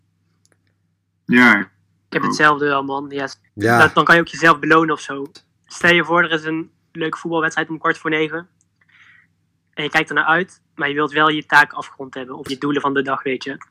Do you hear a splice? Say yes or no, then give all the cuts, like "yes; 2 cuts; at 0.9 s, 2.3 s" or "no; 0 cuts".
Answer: yes; 3 cuts; at 3.5 s, 5.3 s, 12.5 s